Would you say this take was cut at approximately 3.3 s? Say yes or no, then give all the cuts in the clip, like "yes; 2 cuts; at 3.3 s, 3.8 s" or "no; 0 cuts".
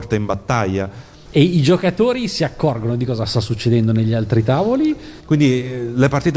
no; 2 cuts; at 1.3 s, 5.2 s